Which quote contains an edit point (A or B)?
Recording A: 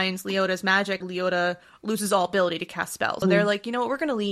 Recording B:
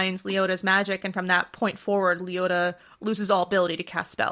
A